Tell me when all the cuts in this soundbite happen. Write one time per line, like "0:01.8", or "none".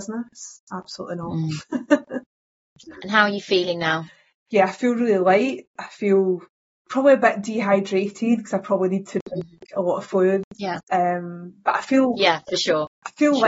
none